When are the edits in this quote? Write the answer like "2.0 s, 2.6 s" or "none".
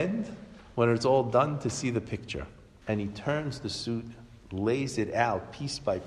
2.8 s